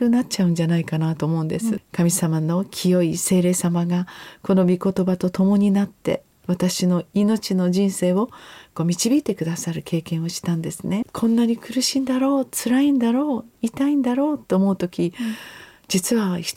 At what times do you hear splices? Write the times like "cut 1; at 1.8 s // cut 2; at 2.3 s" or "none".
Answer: cut 1; at 1.8 s // cut 2; at 11.0 s

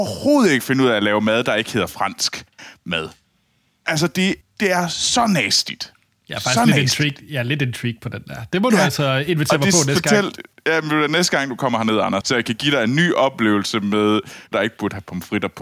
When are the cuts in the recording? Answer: cut 1; at 4.4 s // cut 2; at 12.2 s // cut 3; at 14.5 s

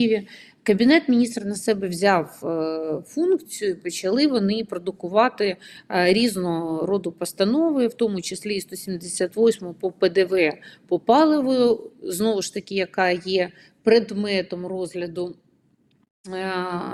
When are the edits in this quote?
none

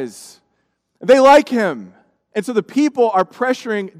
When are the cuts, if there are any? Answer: none

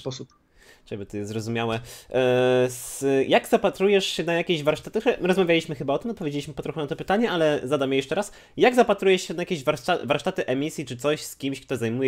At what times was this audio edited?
none

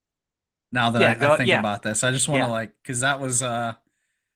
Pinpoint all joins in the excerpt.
none

